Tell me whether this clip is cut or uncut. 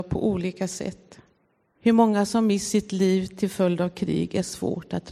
cut